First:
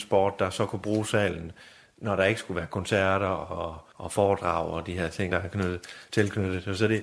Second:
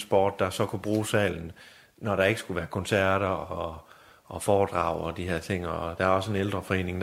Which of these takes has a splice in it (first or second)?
first